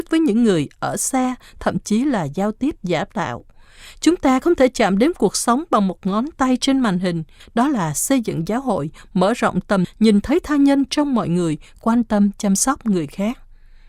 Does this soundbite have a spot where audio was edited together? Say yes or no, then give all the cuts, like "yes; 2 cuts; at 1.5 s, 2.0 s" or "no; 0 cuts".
yes; 2 cuts; at 7.4 s, 9.8 s